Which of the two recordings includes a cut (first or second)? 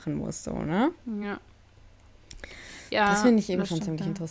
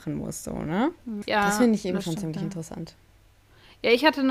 second